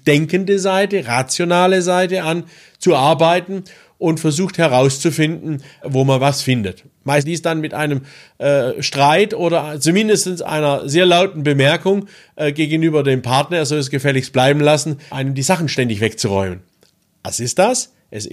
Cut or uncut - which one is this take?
uncut